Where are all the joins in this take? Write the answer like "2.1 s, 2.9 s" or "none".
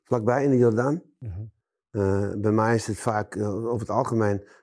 1.8 s